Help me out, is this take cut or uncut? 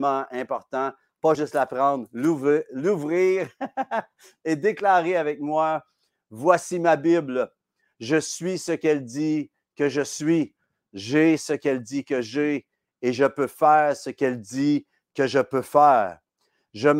uncut